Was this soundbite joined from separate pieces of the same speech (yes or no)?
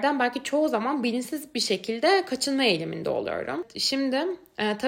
no